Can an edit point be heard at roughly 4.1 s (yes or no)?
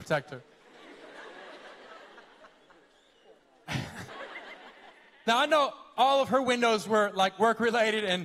yes